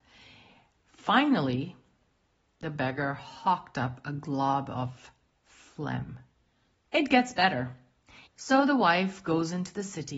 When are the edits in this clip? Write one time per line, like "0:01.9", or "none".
0:06.8
0:08.3